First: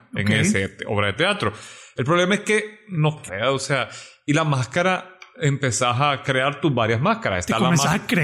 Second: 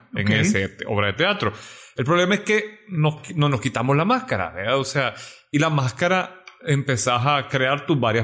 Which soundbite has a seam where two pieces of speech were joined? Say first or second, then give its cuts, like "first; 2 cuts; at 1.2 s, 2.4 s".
first; 1 cut; at 3.3 s